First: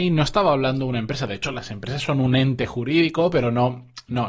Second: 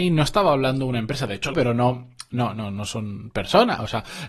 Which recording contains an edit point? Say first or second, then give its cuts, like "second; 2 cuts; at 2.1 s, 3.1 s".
second; 1 cut; at 1.5 s